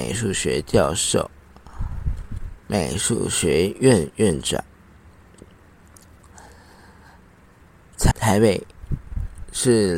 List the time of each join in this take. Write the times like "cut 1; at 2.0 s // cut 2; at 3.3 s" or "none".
cut 1; at 2.6 s // cut 2; at 8.1 s